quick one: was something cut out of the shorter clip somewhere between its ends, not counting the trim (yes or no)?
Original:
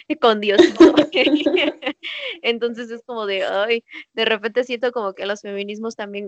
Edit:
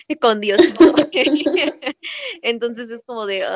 no